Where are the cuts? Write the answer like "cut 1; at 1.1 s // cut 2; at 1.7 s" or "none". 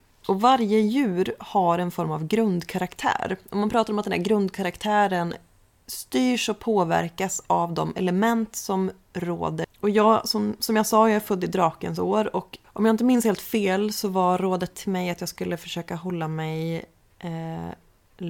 none